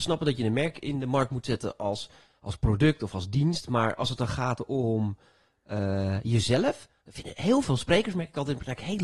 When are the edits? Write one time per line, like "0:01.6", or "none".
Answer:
none